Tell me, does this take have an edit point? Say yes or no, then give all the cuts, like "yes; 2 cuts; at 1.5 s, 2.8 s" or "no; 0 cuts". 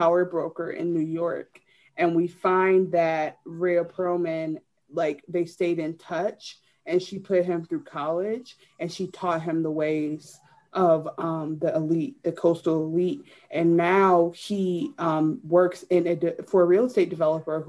no; 0 cuts